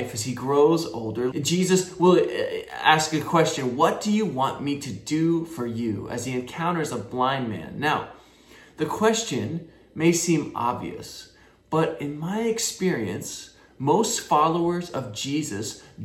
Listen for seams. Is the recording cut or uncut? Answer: cut